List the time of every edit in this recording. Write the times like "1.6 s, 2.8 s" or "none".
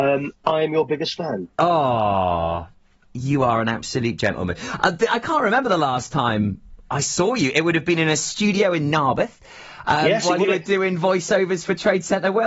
none